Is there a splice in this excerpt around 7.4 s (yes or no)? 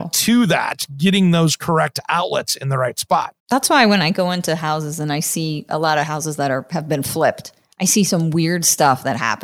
no